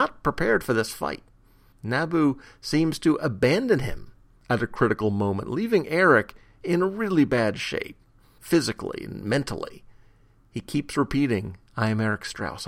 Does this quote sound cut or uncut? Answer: uncut